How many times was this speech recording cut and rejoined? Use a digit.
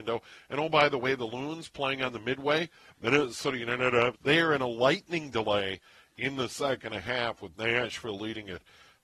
1